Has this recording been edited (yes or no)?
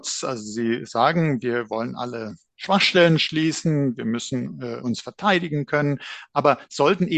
no